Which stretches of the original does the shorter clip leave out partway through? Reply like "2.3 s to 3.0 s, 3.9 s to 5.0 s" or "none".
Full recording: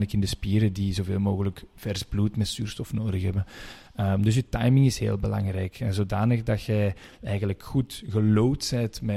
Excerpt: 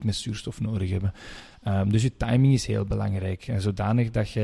none